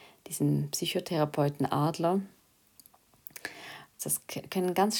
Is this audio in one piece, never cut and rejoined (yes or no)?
no